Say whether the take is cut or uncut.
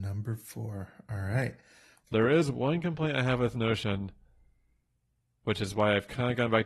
cut